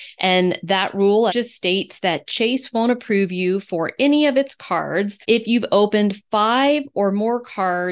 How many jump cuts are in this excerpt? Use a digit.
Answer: 2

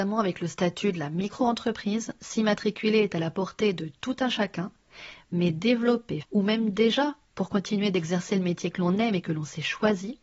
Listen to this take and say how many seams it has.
1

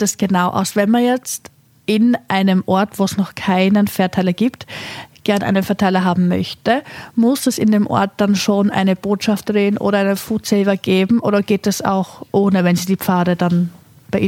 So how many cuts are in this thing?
0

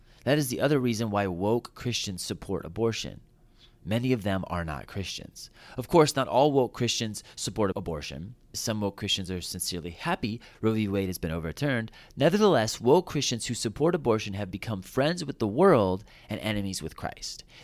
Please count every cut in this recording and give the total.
1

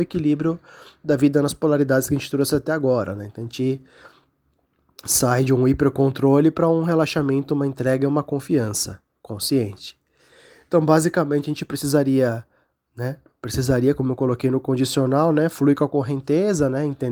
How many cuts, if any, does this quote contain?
0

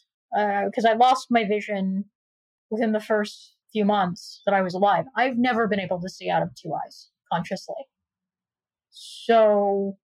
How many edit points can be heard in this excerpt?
1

